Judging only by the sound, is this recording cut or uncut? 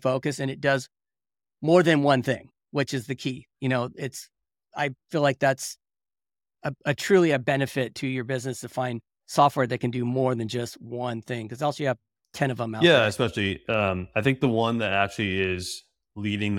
uncut